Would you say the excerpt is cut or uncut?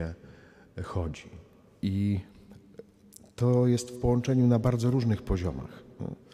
uncut